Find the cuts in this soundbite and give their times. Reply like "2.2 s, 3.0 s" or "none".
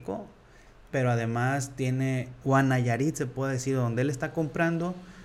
0.9 s, 2.4 s